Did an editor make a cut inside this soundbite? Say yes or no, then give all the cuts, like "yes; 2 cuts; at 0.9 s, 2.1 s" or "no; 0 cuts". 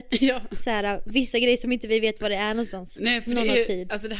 no; 0 cuts